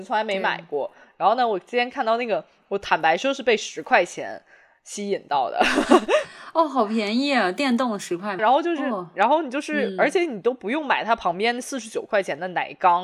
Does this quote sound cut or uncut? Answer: cut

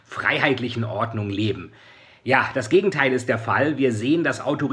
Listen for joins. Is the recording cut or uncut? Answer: uncut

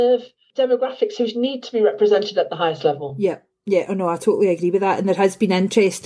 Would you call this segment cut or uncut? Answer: uncut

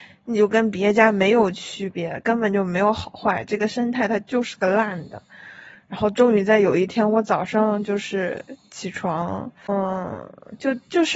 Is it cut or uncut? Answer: uncut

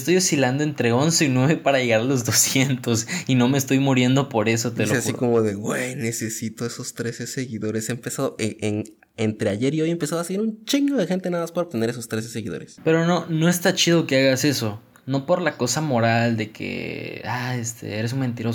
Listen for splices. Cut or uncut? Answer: uncut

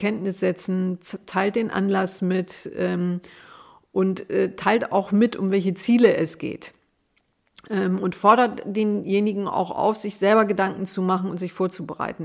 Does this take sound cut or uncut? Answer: uncut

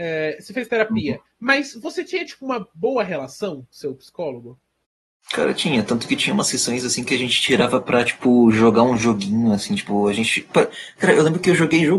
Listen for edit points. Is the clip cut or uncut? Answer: uncut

